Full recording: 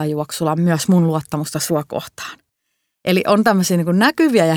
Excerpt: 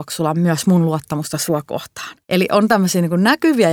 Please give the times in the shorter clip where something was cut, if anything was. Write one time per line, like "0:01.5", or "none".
0:02.2